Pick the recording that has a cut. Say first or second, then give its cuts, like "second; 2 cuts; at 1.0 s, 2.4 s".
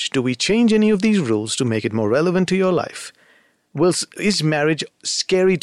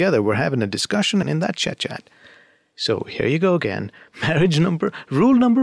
second; 1 cut; at 1.2 s